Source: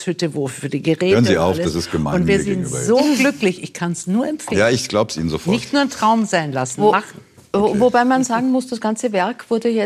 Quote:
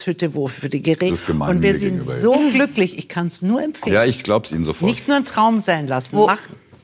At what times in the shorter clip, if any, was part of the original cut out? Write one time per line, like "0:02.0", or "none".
0:01.1